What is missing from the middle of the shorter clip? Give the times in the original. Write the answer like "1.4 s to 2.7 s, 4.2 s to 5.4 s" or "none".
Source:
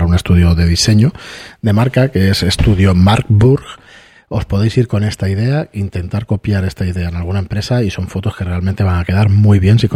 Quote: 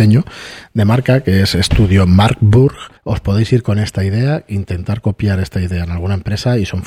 3.8 s to 4.2 s

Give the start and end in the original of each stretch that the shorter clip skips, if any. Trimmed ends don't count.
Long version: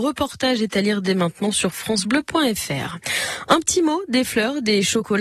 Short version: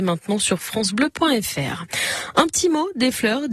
none

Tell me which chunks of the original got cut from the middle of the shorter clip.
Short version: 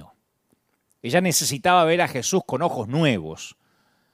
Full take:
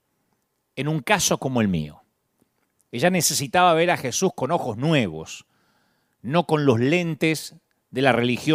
none

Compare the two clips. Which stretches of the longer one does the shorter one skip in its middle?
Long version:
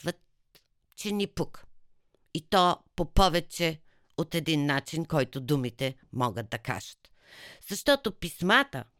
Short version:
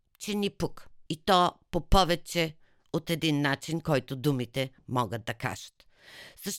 1.8 s to 2.3 s

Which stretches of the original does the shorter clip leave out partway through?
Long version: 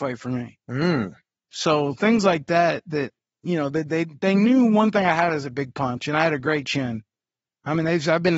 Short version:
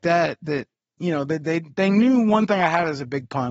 none

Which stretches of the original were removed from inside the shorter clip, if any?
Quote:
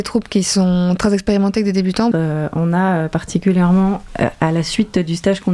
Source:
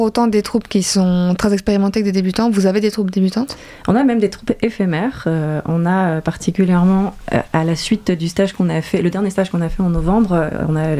2.5 s to 5.2 s

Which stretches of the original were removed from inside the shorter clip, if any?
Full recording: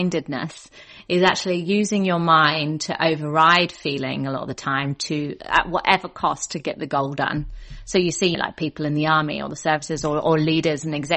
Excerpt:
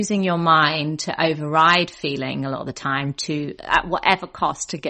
none

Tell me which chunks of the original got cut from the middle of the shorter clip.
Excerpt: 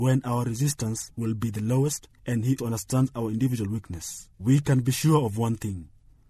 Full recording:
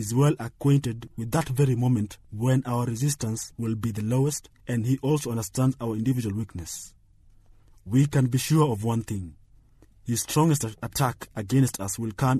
5.0 s to 5.2 s, 7.0 s to 7.8 s

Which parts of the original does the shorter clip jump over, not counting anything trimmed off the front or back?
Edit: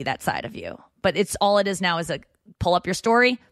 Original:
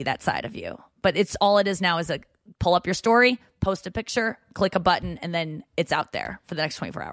none

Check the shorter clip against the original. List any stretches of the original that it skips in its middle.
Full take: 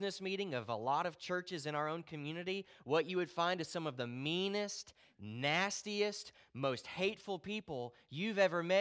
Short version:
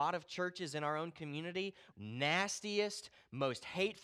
2.8 s to 5.1 s

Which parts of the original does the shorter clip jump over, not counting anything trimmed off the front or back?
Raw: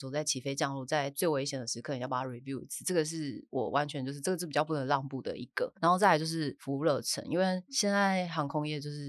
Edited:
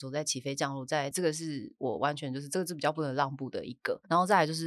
1.1 s to 2.8 s

